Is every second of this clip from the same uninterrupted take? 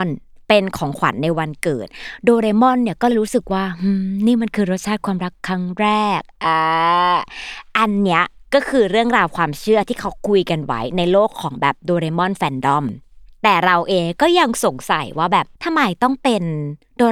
no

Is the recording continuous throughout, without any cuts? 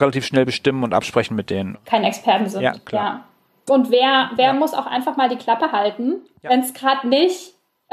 no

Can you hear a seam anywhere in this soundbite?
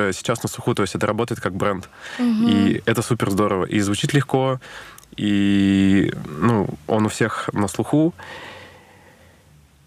no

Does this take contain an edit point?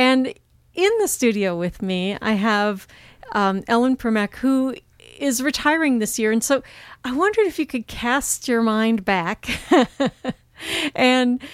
no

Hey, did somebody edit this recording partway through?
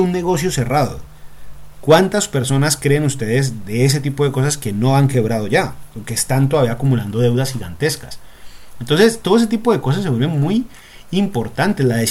no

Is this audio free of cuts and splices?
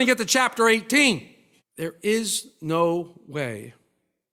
no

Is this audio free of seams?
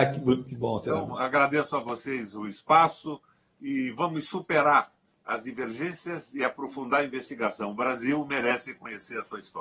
yes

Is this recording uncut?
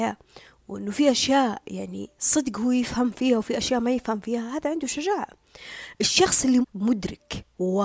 no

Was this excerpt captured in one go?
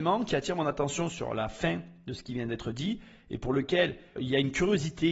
no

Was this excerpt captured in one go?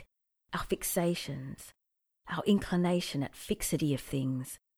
yes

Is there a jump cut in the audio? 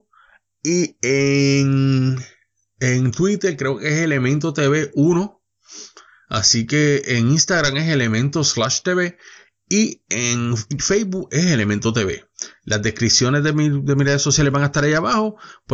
no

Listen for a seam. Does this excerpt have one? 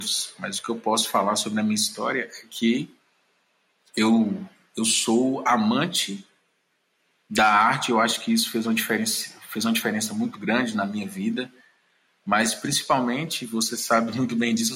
no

